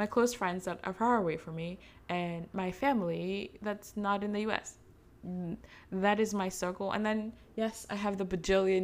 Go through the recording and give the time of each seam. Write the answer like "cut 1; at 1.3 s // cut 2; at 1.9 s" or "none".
none